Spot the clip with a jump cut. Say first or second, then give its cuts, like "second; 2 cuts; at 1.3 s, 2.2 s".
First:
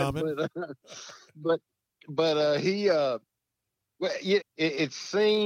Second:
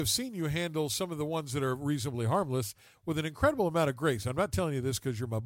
first; 1 cut; at 4.4 s